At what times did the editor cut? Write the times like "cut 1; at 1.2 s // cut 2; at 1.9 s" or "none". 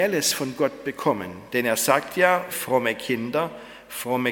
cut 1; at 2.5 s

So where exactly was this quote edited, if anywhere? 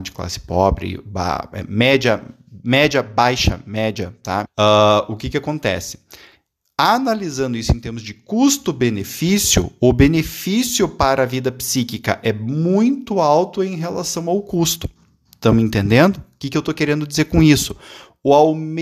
cut 1; at 4.4 s

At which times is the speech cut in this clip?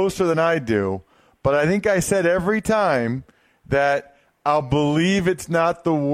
none

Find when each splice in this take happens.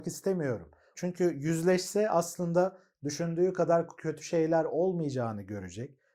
cut 1; at 0.9 s

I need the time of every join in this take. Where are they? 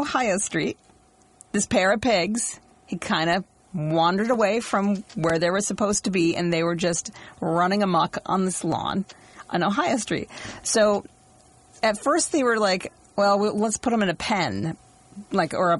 none

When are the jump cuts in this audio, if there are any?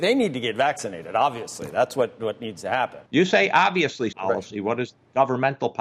cut 1; at 3.1 s // cut 2; at 4.1 s

